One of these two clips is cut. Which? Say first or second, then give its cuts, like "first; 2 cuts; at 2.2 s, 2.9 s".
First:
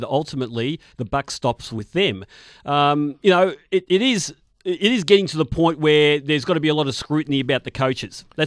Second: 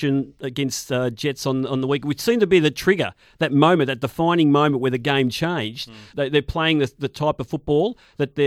second; 1 cut; at 6.1 s